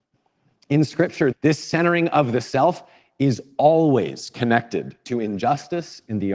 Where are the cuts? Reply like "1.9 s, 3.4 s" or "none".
1.3 s